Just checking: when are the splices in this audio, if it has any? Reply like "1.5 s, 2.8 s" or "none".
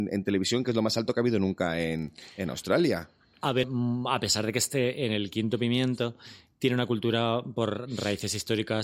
3.6 s